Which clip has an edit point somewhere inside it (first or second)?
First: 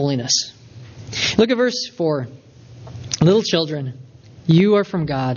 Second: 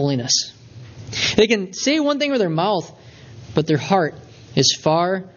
first